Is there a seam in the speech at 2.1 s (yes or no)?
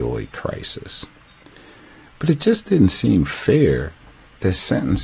yes